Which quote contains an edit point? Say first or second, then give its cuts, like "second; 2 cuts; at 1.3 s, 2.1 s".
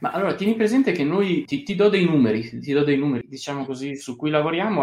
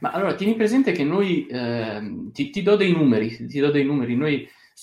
first; 2 cuts; at 1.5 s, 3.2 s